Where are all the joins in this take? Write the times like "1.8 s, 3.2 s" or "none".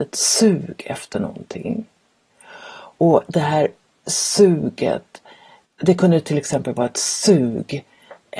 none